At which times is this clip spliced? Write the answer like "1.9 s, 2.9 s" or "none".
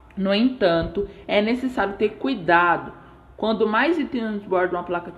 none